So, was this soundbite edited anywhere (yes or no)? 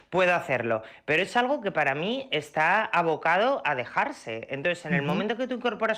no